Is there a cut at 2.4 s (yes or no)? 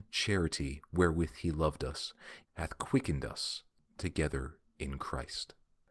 yes